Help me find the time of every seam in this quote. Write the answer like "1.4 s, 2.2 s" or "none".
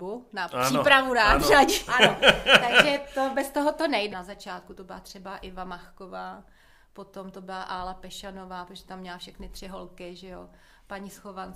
1.9 s, 4.1 s